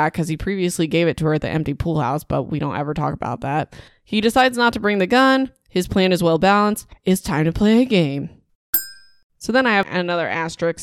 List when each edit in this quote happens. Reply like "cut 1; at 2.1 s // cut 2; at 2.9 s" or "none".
none